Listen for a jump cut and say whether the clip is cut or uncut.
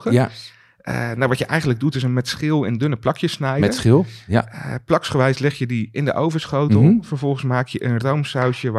uncut